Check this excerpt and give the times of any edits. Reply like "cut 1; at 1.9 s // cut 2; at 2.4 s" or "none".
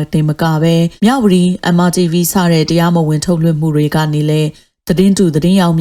cut 1; at 1.0 s